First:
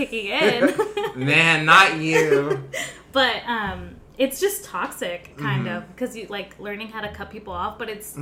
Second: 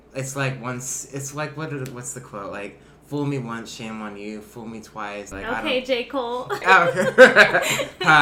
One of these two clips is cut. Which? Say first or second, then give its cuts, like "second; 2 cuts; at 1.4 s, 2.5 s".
second; 2 cuts; at 5.3 s, 6.6 s